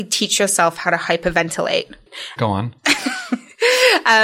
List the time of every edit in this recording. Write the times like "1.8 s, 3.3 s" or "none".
2.4 s

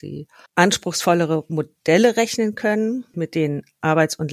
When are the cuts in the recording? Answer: 3.1 s

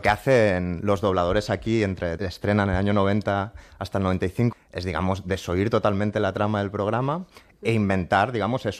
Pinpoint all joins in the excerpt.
2.2 s, 4.5 s

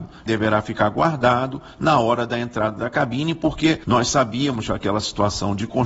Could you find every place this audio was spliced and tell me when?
none

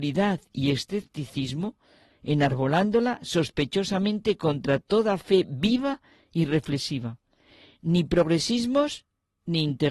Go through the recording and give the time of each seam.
2.1 s

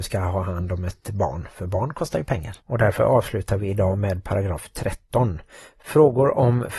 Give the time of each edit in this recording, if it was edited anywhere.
2.6 s

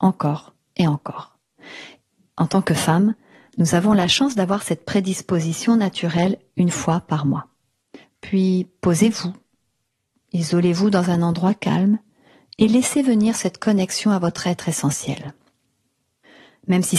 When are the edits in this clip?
8.0 s

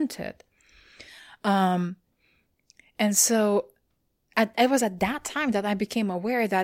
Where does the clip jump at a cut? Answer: none

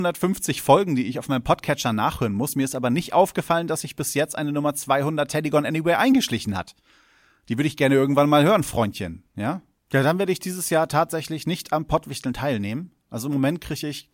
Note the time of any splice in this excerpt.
9.8 s

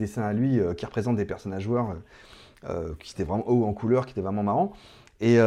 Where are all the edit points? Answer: none

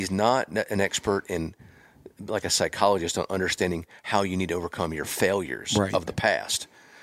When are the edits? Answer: none

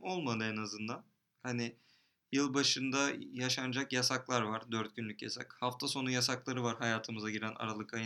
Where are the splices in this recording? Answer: none

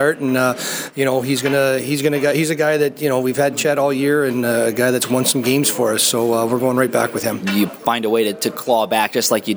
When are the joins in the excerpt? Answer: 7.4 s

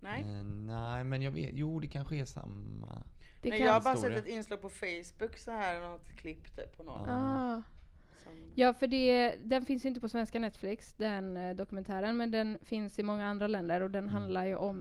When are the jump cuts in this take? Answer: none

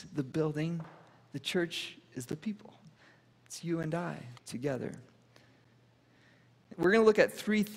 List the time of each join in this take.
4.4 s, 6.7 s

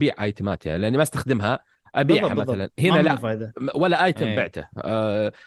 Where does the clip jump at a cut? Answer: none

